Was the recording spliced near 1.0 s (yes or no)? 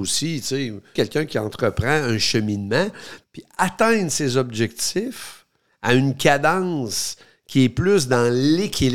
yes